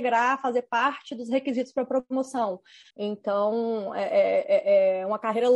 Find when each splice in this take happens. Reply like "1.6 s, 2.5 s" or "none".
2.9 s